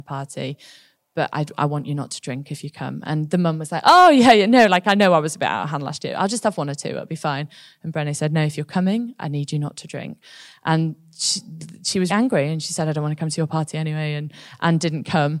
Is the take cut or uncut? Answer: cut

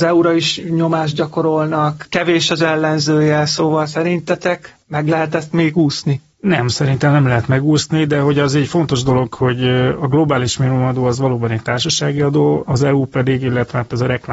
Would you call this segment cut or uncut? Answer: uncut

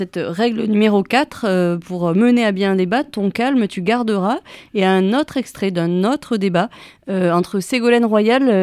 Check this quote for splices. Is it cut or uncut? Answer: uncut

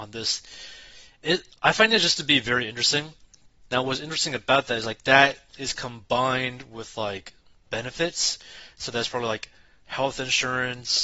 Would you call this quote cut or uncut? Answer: cut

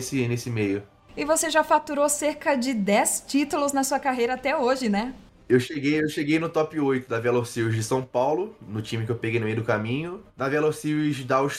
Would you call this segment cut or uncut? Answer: uncut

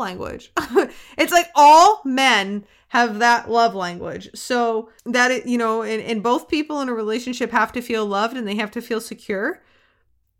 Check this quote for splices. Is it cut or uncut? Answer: cut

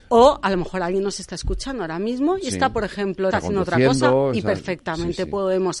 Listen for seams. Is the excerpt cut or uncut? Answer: cut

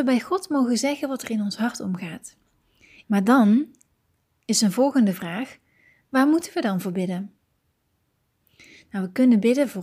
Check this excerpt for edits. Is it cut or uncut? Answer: cut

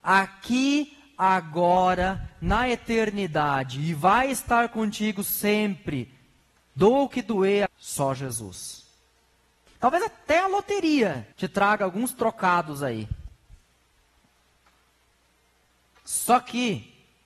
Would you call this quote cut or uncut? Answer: cut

